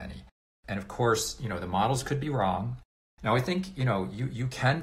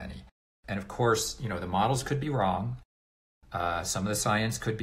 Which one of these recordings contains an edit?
first; 1 cut; at 3.1 s

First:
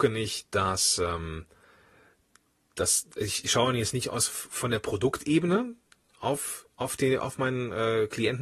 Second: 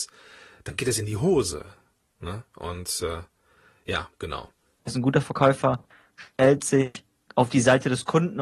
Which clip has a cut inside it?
second; 1 cut; at 4.8 s

